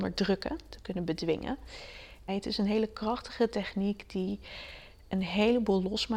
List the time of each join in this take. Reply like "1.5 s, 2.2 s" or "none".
2.3 s